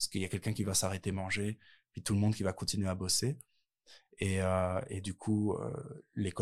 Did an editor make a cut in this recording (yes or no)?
no